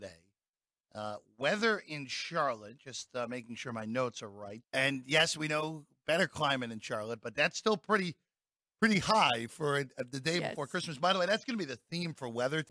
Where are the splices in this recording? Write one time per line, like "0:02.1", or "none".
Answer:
0:04.6